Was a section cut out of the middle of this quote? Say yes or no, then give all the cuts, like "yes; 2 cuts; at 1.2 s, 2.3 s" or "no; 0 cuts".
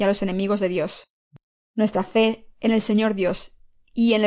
no; 0 cuts